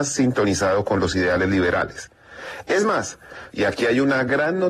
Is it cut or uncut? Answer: cut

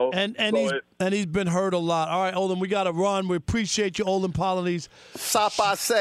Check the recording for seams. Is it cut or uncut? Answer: uncut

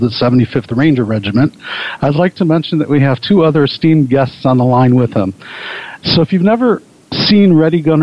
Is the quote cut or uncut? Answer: uncut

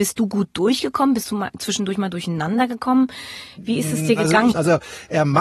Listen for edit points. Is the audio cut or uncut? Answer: cut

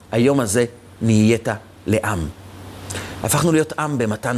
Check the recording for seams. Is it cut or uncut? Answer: uncut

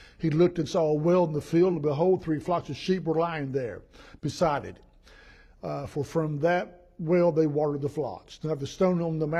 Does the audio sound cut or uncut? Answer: uncut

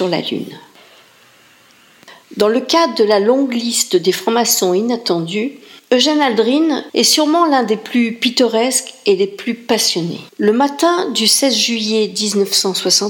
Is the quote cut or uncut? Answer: cut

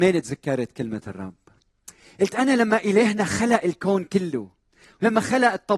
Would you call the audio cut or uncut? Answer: uncut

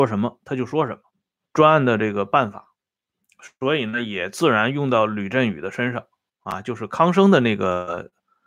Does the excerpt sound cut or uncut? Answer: cut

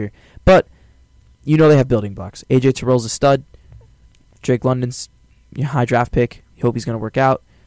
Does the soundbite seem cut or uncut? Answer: uncut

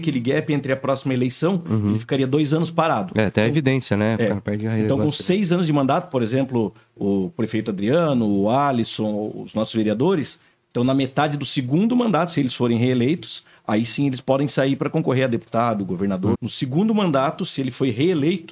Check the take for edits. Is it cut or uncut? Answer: cut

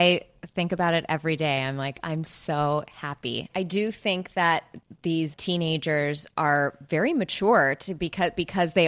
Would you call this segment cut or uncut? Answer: cut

